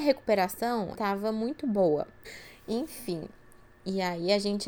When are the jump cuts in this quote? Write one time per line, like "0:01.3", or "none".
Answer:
0:00.9
0:02.2